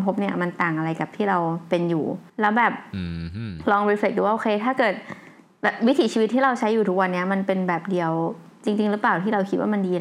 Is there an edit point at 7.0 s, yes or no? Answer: no